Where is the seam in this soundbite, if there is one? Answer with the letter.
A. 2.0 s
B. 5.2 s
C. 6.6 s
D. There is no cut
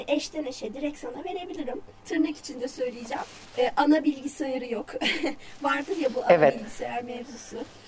A